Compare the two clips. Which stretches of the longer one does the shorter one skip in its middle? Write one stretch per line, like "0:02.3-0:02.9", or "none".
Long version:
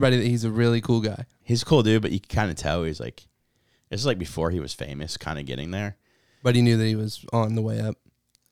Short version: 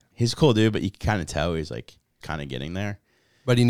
0:03.5-0:05.2